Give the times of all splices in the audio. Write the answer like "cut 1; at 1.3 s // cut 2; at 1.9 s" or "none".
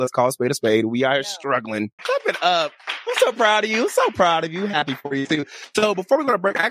cut 1; at 2.0 s